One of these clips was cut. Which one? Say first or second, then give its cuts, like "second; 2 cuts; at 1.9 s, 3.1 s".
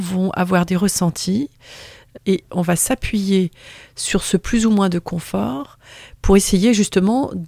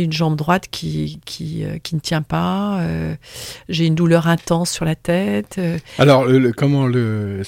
first; 1 cut; at 2.2 s